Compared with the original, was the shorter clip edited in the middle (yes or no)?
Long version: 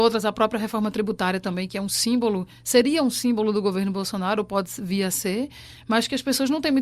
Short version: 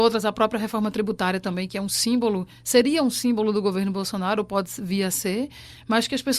no